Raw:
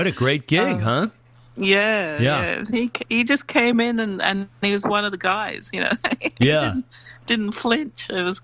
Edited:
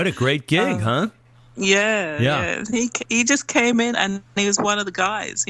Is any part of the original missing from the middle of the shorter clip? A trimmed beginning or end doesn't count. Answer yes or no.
yes